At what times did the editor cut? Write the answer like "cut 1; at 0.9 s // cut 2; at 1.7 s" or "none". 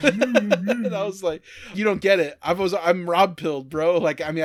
cut 1; at 1.7 s